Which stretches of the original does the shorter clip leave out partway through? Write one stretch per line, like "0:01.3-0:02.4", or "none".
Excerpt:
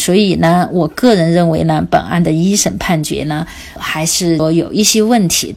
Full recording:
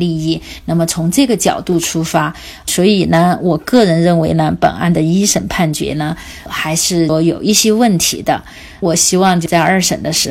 none